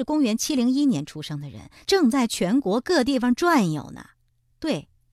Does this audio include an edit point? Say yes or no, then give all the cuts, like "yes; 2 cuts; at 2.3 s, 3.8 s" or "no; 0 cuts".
yes; 1 cut; at 1.8 s